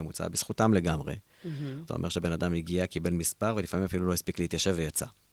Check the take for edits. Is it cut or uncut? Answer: cut